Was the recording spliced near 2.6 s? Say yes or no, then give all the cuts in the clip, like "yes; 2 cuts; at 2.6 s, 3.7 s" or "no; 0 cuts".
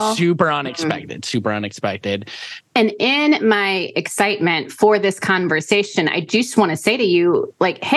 yes; 1 cut; at 2.6 s